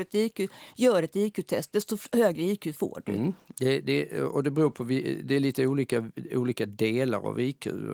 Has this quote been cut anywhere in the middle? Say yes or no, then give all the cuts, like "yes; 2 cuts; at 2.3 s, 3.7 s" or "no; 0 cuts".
no; 0 cuts